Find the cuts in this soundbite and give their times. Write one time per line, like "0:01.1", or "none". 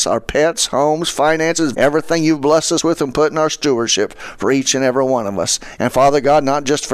0:01.7
0:05.8